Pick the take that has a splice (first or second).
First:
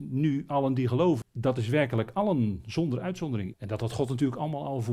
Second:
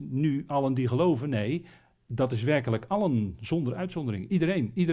first